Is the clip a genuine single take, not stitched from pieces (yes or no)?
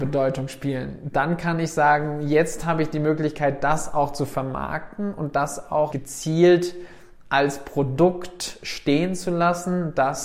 no